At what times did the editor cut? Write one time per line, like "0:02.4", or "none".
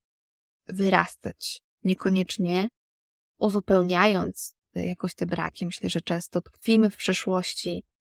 none